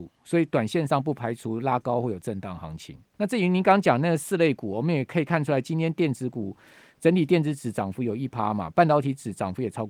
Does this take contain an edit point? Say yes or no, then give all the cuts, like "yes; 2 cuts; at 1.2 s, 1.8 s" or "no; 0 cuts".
yes; 1 cut; at 3.1 s